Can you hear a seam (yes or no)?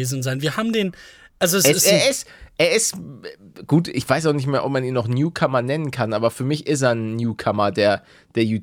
no